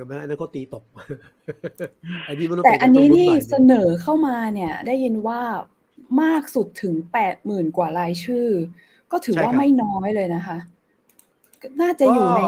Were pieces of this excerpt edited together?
no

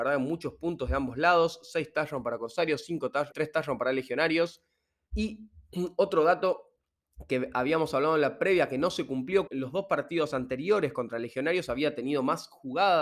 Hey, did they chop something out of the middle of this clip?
yes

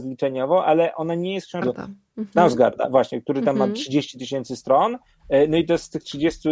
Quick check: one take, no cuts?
no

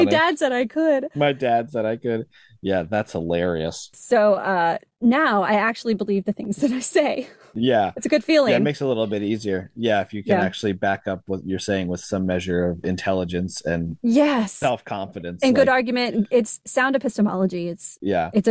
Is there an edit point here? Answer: no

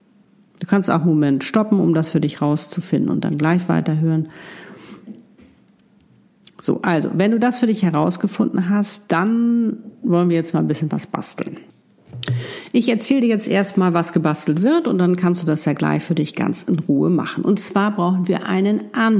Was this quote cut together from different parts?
no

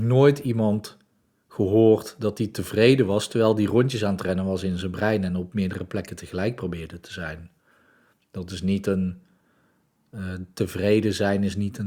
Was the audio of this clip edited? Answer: no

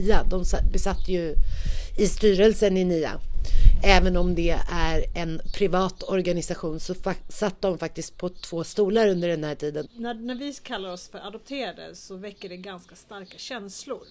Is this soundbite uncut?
no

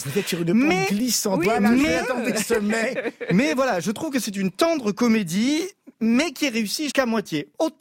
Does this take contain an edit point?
yes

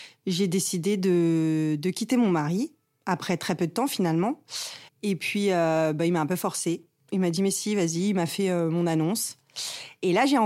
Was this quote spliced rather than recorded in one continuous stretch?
yes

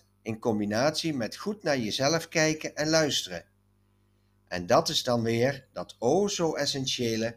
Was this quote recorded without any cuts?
yes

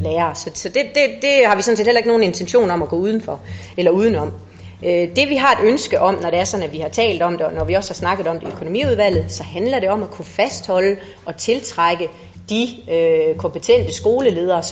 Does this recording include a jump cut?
no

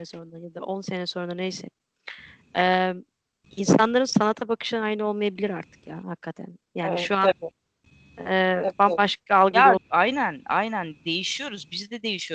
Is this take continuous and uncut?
no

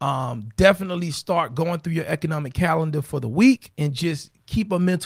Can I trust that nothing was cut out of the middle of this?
yes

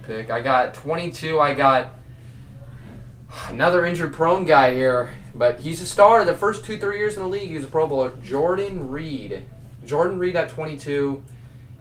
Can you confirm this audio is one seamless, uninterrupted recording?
yes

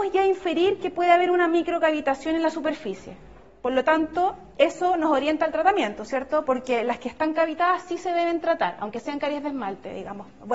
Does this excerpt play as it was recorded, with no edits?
yes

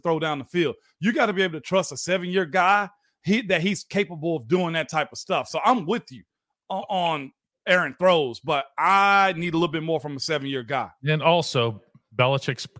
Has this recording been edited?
no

